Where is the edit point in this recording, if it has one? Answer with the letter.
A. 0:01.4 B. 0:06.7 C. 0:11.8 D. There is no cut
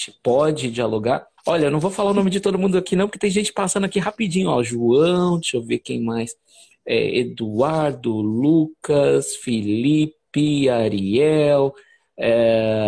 A